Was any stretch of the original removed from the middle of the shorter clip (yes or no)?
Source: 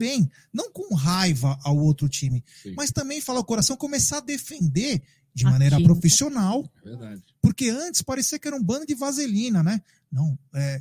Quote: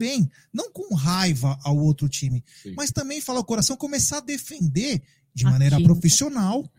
no